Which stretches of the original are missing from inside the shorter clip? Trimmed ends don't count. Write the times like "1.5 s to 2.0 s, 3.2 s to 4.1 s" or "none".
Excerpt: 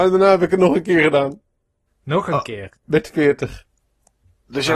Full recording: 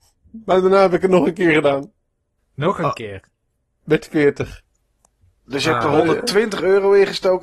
3.3 s to 3.7 s